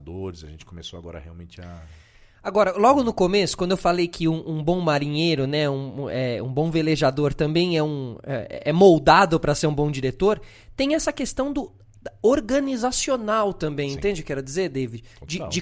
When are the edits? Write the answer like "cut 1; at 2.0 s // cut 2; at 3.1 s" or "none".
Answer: none

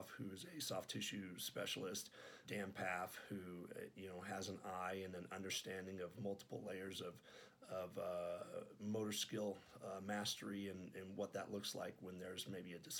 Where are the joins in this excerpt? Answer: cut 1; at 2.4 s

